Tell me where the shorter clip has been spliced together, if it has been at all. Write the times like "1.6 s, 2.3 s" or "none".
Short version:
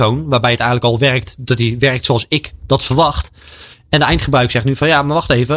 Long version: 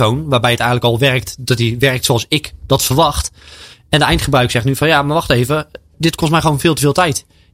none